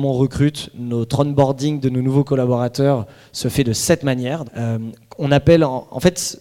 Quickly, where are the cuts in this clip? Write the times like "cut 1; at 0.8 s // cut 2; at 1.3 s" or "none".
cut 1; at 4.5 s